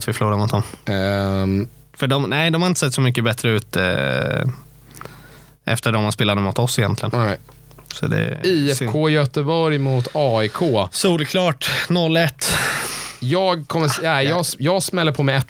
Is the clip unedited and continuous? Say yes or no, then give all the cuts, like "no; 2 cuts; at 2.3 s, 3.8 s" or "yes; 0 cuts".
yes; 0 cuts